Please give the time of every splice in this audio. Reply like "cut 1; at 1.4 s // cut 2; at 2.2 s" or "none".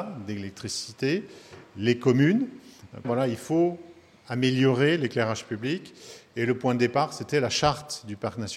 cut 1; at 3.0 s